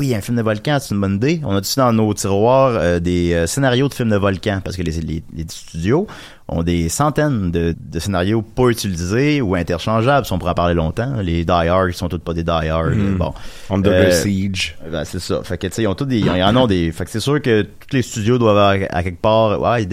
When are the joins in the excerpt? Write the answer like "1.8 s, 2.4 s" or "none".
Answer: 7.7 s